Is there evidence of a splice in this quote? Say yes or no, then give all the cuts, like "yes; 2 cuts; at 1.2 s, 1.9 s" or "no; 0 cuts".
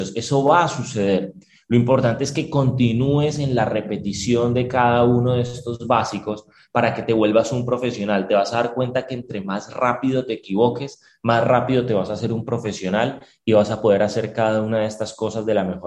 no; 0 cuts